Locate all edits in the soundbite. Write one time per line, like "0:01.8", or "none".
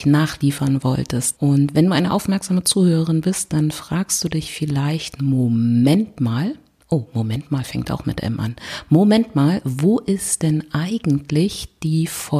0:01.4